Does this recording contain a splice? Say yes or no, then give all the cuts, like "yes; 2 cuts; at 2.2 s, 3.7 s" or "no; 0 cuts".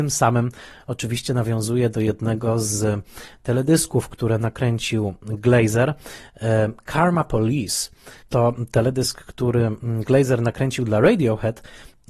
no; 0 cuts